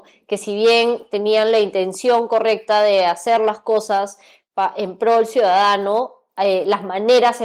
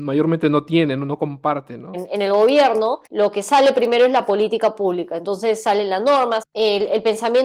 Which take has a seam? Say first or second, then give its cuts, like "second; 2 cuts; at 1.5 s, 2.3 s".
second; 3 cuts; at 1.9 s, 3.1 s, 6.4 s